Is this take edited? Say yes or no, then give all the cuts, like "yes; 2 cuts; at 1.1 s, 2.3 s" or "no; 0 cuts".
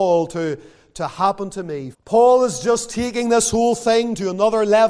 yes; 1 cut; at 1.9 s